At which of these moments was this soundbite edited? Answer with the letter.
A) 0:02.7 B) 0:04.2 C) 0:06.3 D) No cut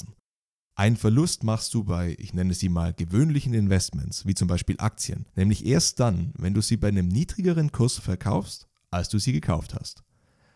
D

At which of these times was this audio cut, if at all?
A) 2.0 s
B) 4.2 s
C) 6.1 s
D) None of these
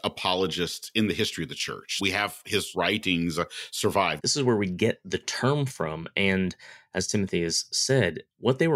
B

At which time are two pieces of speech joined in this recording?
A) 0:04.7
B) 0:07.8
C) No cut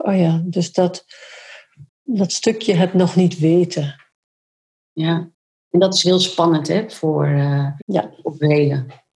B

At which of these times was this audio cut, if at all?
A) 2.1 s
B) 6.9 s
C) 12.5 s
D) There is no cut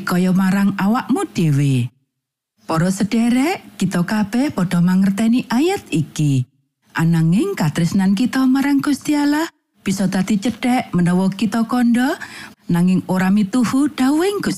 C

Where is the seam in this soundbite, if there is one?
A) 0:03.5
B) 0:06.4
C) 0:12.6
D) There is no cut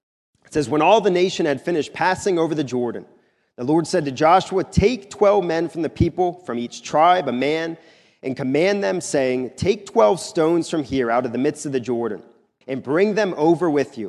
C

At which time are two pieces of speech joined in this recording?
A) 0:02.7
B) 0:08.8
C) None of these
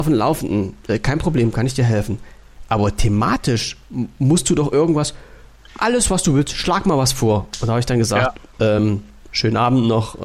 C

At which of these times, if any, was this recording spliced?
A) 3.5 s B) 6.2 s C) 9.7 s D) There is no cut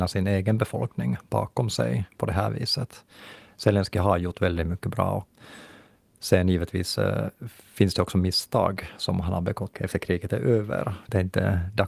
C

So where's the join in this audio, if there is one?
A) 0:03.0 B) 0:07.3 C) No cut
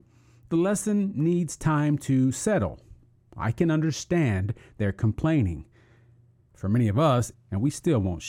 B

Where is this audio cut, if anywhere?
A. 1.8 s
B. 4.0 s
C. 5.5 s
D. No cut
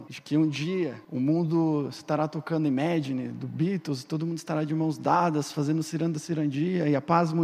D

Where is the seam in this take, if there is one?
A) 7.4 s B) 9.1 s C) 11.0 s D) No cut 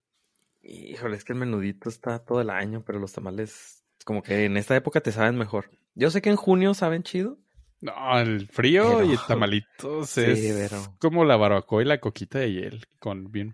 D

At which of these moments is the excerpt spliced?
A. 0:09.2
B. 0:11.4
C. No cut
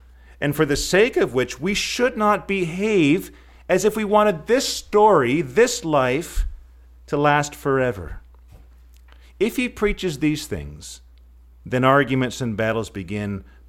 C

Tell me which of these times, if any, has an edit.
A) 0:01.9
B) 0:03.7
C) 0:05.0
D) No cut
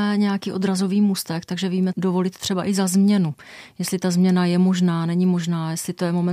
A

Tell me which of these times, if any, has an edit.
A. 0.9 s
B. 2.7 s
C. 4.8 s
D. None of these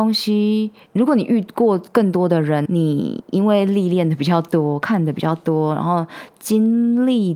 B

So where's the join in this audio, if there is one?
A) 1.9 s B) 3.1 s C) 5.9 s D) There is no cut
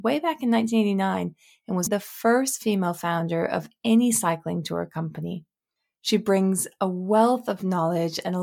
A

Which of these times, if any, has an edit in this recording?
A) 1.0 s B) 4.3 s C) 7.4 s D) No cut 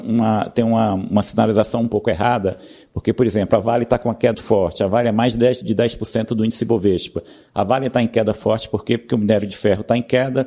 B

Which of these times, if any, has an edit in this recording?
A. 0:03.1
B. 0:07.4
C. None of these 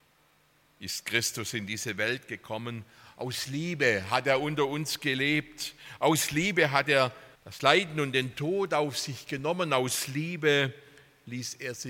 B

